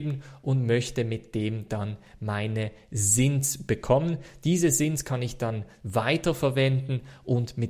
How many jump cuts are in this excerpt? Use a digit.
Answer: 0